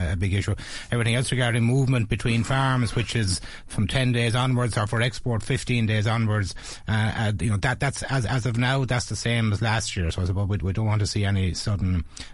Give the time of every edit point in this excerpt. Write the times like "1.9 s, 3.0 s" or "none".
none